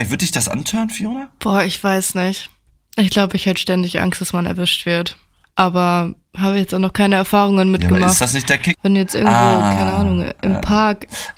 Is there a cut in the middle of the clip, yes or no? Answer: yes